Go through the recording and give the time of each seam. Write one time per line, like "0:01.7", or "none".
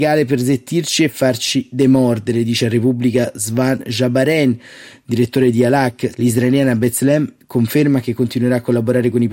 0:06.1